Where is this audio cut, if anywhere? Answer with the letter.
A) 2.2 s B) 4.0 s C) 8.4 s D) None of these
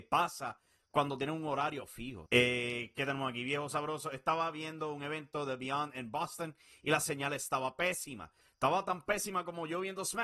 A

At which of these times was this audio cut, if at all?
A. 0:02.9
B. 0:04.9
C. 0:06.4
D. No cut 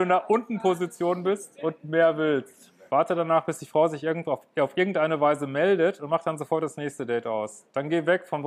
A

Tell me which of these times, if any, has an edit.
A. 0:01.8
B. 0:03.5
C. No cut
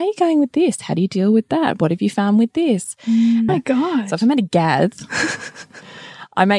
B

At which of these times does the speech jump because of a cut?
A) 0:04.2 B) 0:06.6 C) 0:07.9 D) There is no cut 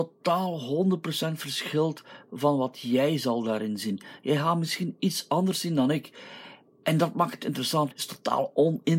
C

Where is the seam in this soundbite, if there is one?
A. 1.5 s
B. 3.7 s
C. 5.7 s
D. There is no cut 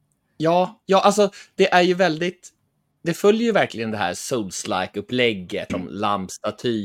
C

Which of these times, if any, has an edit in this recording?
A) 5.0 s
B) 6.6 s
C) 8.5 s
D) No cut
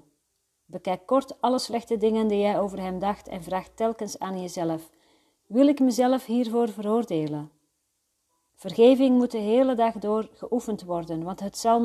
C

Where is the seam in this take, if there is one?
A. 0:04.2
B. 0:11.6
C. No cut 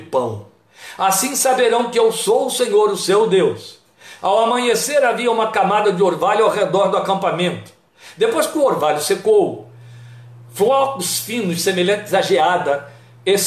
A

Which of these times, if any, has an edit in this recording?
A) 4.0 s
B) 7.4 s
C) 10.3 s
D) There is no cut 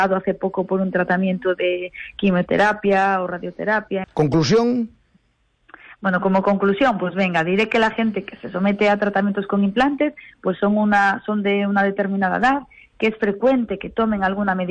A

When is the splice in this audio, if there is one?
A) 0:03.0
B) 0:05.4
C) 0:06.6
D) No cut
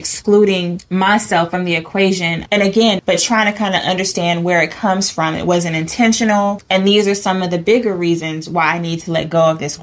A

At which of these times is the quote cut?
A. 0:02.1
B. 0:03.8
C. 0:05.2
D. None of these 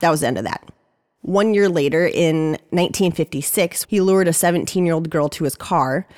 B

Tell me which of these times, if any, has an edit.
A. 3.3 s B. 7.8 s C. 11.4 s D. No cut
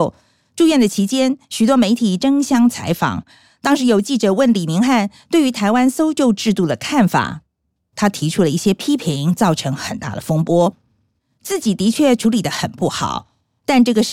C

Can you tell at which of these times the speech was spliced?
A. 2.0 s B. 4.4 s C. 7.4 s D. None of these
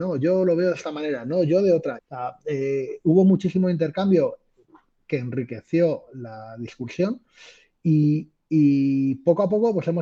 A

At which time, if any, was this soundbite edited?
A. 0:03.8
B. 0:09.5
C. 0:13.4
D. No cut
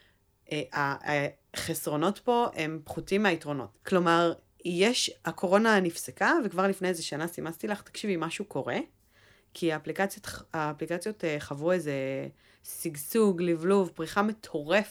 A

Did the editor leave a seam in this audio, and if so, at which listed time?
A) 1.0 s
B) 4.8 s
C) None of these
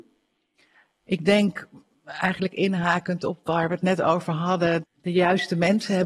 B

